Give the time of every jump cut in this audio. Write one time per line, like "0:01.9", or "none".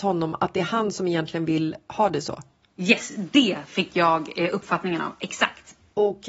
none